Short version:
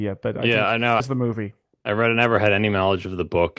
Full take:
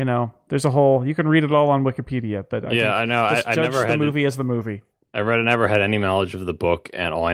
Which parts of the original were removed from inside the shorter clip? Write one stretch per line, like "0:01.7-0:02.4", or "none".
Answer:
0:03.3-0:04.3